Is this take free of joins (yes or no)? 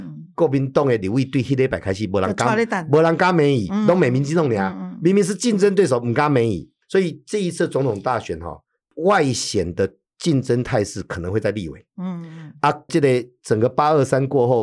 yes